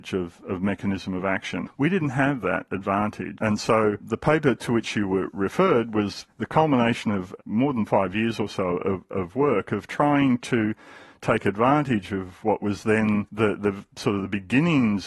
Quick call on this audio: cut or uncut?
cut